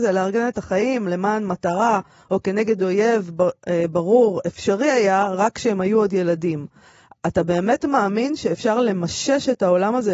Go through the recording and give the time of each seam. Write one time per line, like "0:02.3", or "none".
none